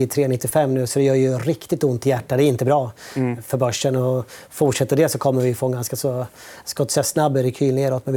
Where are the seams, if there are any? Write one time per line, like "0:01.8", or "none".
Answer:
none